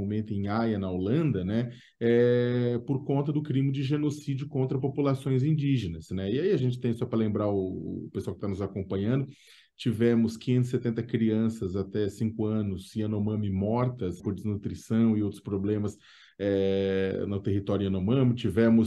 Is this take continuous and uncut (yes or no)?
no